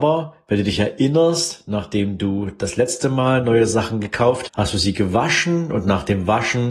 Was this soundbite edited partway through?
yes; 1 cut; at 4.5 s

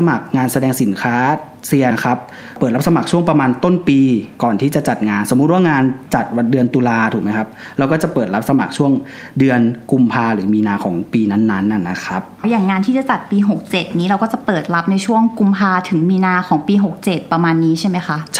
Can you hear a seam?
yes; 2 cuts; at 1.9 s, 12.4 s

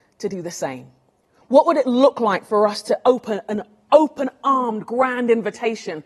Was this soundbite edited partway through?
no; 0 cuts

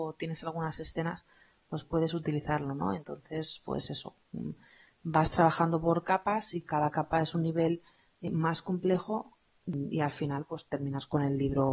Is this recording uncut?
yes; 0 cuts

